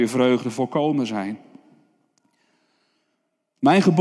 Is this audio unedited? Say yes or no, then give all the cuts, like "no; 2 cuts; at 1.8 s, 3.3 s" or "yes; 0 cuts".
yes; 0 cuts